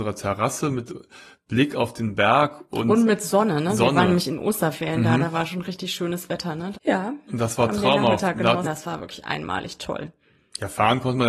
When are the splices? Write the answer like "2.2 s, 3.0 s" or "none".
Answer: 6.7 s, 8.6 s